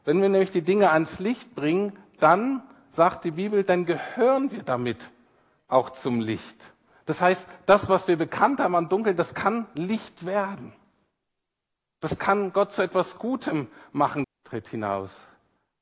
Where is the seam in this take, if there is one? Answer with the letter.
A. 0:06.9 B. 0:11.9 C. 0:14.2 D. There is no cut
C